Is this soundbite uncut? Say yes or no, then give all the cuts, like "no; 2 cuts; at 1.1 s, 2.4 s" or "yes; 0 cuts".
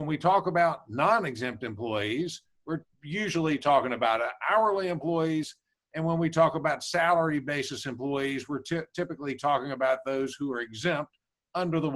yes; 0 cuts